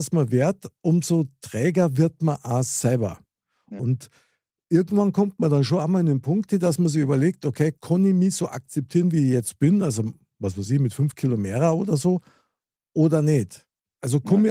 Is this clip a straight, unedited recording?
no; 1 cut; at 3.8 s

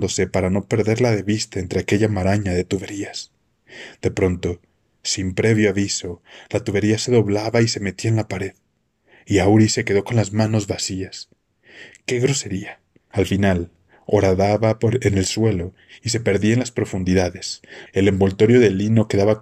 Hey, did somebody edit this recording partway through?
yes; 2 cuts; at 13.1 s, 17.9 s

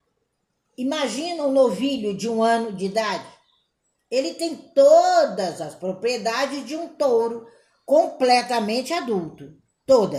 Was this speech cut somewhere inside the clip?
no; 0 cuts

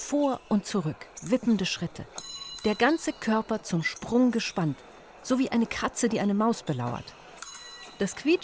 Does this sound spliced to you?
no; 0 cuts

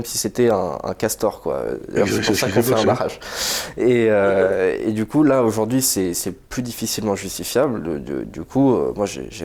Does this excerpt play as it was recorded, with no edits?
yes; 0 cuts

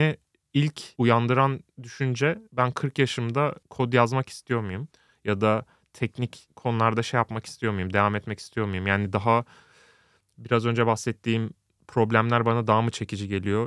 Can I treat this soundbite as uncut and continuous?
yes; 0 cuts

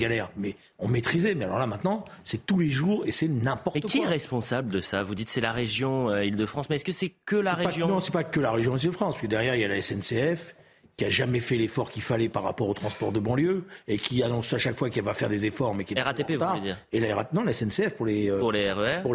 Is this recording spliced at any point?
no; 0 cuts

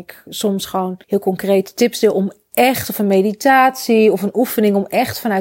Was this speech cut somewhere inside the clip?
yes; 1 cut; at 1.0 s

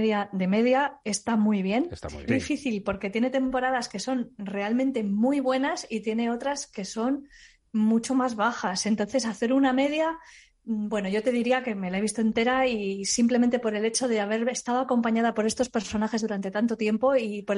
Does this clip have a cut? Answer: yes; 1 cut; at 2.3 s

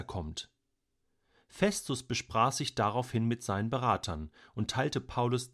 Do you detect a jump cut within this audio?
no; 0 cuts

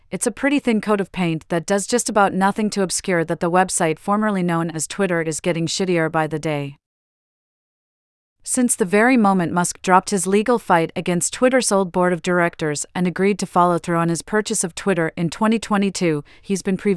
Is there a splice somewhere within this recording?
no; 0 cuts

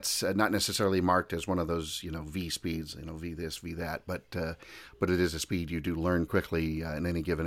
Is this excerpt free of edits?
no; 1 cut; at 6.3 s

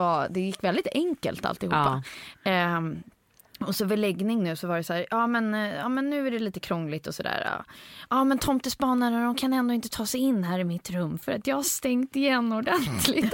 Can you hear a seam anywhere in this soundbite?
no; 0 cuts

